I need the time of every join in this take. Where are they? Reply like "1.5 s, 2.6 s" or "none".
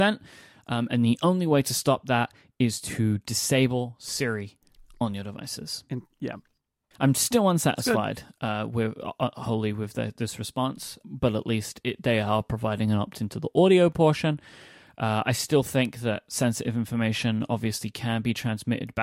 6.9 s, 11.0 s